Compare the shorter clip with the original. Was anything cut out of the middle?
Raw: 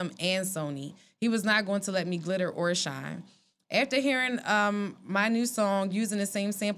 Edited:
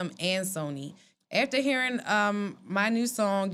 yes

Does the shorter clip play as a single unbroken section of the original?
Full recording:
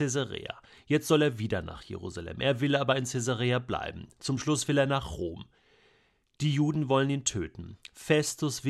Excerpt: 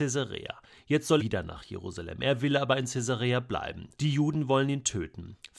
no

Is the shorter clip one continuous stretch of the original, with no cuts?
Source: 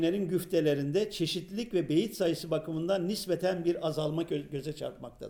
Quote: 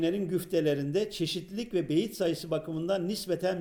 yes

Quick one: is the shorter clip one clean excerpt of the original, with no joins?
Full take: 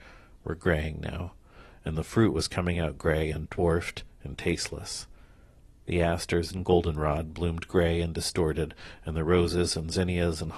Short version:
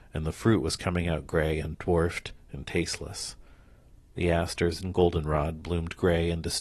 yes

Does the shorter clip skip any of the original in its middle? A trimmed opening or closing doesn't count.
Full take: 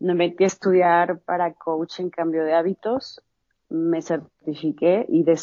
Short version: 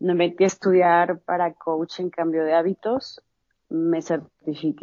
no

